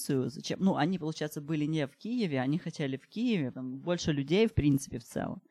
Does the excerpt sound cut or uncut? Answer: cut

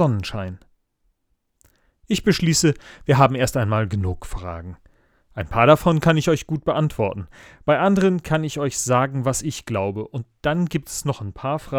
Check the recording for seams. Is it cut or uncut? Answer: uncut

